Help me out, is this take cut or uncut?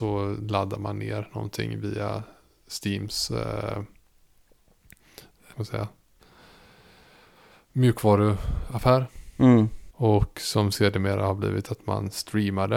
cut